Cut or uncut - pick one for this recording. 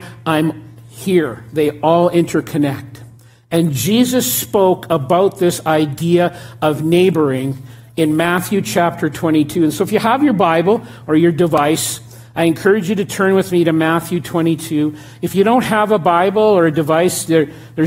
uncut